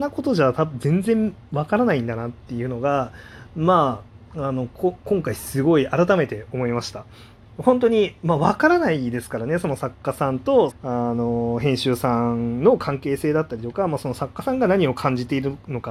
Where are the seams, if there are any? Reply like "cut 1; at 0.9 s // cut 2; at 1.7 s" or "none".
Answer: cut 1; at 7.4 s // cut 2; at 10.7 s